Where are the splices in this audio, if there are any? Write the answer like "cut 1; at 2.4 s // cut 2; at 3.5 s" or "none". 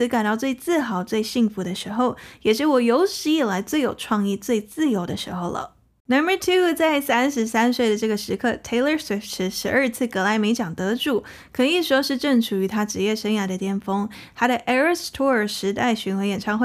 none